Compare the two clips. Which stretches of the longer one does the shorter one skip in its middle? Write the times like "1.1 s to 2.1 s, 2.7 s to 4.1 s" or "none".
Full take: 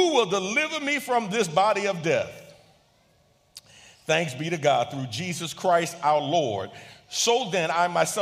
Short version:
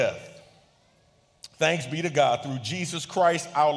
3.7 s to 4.0 s